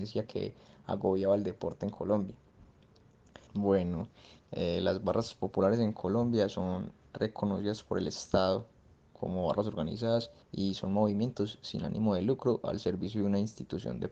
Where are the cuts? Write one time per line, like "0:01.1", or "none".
0:03.5
0:10.4